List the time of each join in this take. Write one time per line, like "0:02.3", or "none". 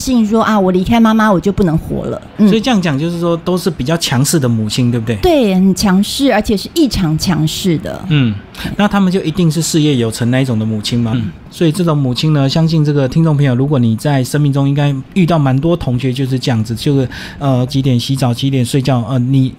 0:11.1
0:17.7